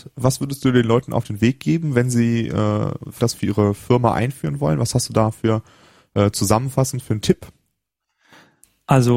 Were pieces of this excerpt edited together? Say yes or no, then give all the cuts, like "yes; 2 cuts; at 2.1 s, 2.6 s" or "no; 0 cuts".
yes; 1 cut; at 3.2 s